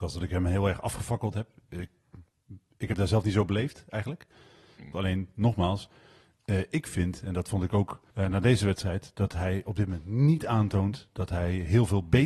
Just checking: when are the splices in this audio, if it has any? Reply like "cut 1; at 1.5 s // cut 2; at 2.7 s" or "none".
cut 1; at 4.9 s // cut 2; at 8.1 s